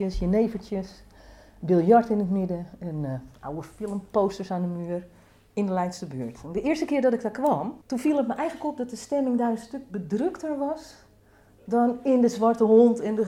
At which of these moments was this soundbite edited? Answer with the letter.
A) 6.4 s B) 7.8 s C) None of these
B